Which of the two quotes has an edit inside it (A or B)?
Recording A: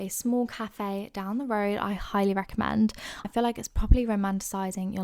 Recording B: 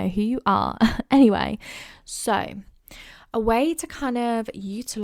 A